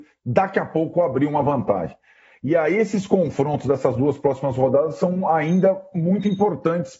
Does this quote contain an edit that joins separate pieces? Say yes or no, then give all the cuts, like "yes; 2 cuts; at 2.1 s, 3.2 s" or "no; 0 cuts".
no; 0 cuts